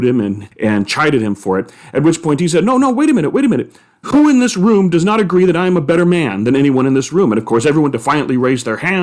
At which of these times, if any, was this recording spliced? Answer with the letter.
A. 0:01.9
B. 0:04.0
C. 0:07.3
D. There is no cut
B